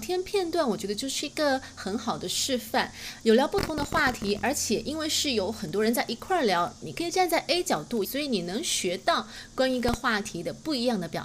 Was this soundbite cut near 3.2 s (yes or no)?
no